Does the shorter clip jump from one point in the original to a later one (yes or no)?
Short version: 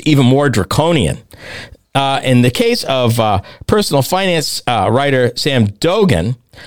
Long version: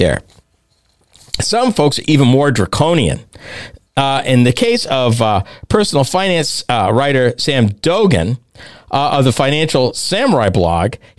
no